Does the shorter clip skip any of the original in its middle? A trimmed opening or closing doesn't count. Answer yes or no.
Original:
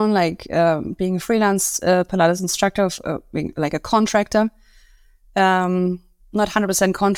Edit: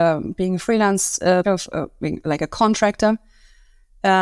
yes